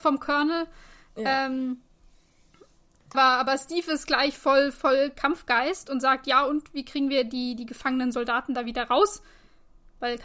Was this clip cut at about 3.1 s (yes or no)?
yes